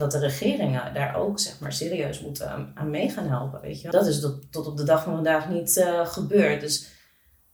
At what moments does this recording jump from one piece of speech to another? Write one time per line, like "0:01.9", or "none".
0:03.9